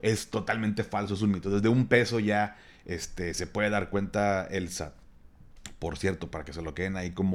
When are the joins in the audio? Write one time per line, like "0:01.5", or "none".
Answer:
none